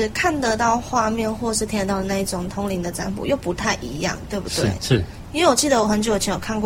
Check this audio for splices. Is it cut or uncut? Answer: cut